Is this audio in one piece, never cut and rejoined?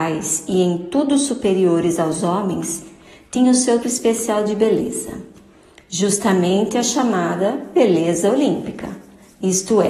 no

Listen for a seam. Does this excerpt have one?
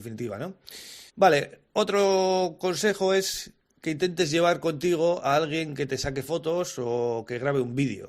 yes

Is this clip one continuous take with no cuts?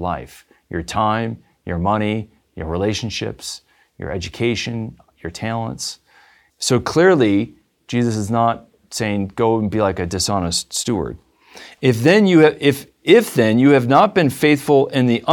no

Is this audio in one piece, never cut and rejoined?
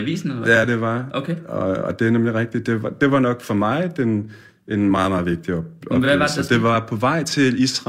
yes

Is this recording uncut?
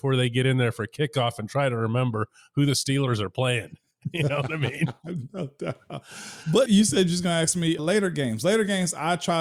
no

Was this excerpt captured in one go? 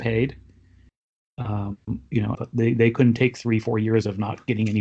no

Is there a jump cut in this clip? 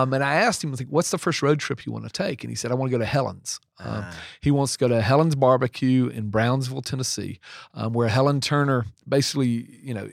no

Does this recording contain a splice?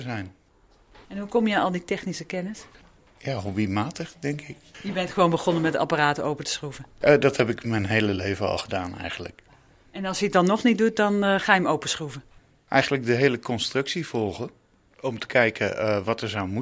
yes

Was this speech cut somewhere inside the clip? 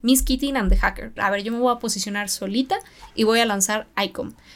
yes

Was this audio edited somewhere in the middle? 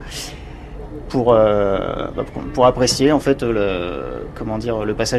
no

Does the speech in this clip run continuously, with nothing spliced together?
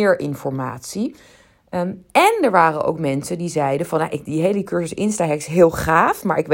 yes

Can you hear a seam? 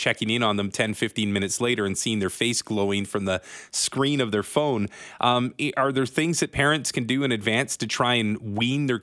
no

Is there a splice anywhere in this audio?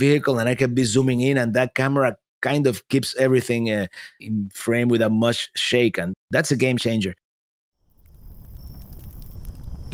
yes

